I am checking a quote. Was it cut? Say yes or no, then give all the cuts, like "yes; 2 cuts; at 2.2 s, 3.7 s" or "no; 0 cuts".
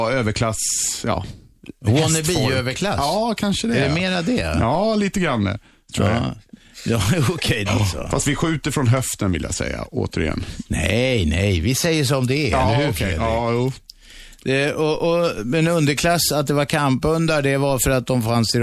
yes; 1 cut; at 7.7 s